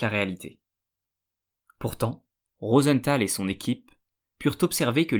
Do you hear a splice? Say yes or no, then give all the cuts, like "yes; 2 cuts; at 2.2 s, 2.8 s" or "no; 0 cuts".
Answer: yes; 1 cut; at 2.5 s